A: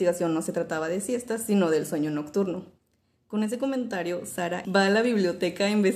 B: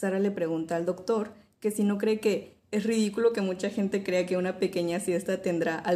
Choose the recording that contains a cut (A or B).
A